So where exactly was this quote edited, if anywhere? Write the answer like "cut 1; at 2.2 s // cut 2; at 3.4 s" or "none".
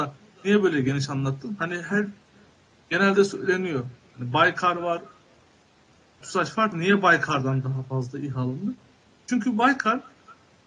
cut 1; at 6.2 s